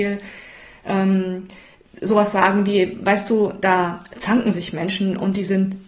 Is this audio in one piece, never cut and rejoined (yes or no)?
yes